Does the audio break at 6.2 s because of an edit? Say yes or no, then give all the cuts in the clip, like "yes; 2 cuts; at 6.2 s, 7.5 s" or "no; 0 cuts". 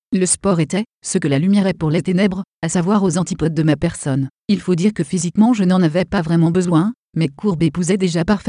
no; 1 cut; at 0.9 s